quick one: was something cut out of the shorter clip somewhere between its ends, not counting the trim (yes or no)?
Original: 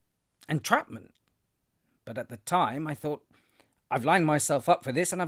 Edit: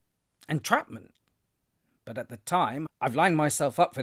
yes